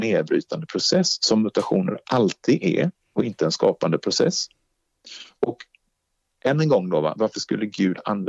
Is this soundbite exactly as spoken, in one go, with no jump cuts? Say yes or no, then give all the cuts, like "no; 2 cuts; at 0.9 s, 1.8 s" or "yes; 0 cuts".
yes; 0 cuts